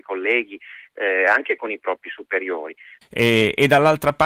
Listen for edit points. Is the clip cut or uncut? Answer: cut